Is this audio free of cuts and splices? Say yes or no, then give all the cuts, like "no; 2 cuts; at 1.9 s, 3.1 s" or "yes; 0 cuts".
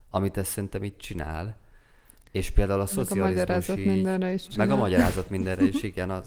yes; 0 cuts